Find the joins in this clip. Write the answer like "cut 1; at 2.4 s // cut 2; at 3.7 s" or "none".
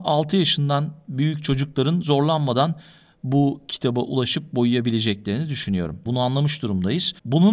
cut 1; at 6.1 s